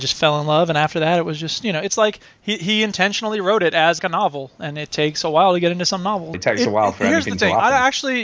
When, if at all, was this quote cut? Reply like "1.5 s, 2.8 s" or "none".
4.0 s, 6.3 s